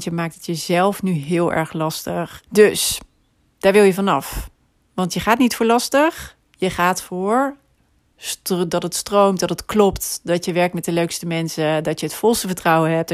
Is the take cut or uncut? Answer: cut